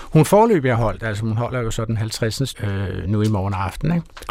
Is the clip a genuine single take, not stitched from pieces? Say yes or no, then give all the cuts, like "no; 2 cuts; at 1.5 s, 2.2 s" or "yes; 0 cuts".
no; 1 cut; at 2.5 s